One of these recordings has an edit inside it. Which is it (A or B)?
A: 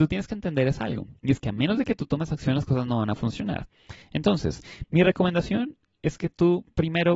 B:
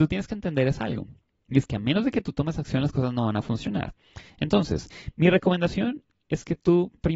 A